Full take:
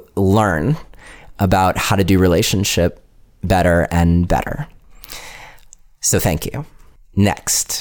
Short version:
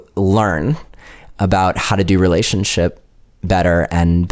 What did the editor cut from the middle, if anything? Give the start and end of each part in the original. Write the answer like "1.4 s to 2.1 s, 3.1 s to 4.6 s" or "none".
none